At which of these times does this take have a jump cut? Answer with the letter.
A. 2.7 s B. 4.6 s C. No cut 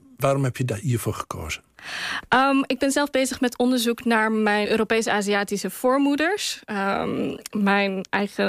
B